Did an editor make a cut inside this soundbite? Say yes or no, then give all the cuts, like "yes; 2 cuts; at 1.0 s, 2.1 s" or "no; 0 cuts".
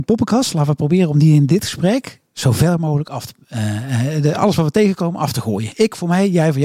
no; 0 cuts